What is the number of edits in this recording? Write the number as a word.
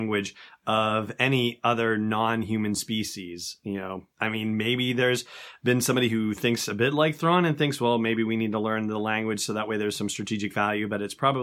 zero